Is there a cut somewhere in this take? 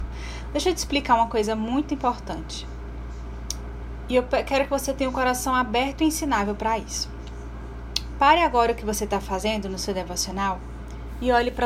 no; 0 cuts

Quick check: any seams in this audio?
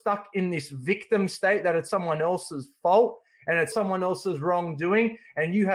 yes; 2 cuts; at 1.9 s, 3.7 s

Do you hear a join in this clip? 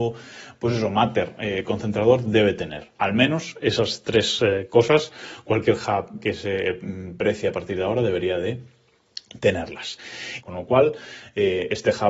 yes; 2 cuts; at 3.0 s, 10.4 s

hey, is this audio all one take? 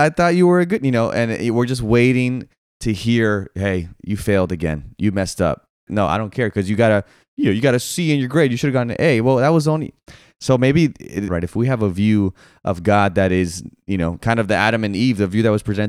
no; 2 cuts; at 5.9 s, 11.3 s

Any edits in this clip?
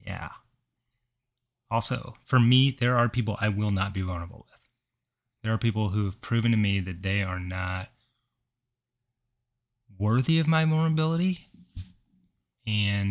no; 0 cuts

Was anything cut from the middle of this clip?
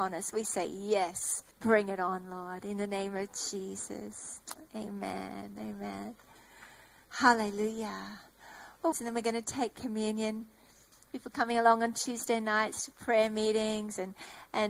yes; 3 cuts; at 1.5 s, 8.9 s, 10.9 s

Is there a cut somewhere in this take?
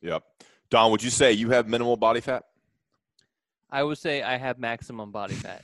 no; 0 cuts

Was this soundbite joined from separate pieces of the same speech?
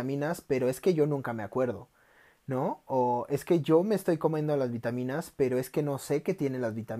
no; 0 cuts

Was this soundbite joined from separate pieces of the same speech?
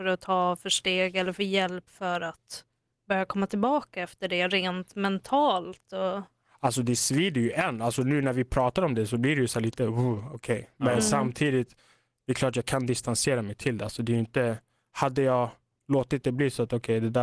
no; 0 cuts

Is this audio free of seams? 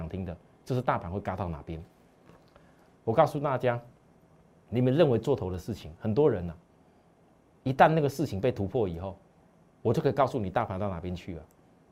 yes; 0 cuts

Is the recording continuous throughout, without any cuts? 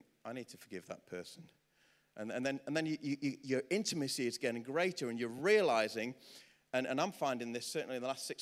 yes; 0 cuts

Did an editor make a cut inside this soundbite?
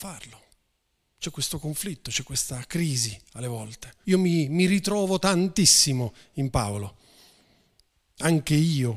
yes; 1 cut; at 4.0 s

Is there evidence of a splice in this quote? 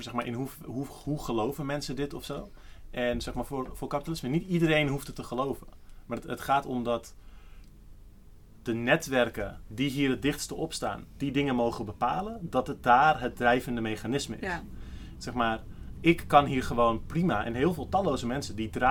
yes; 1 cut; at 8.6 s

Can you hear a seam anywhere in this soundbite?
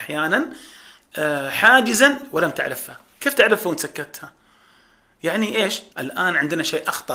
yes; 1 cut; at 5.9 s

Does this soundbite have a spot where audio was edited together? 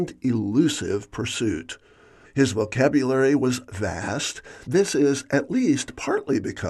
yes; 2 cuts; at 2.2 s, 4.6 s

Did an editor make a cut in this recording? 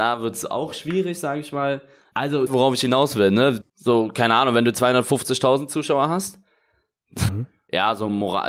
yes; 3 cuts; at 2.5 s, 3.6 s, 7.3 s

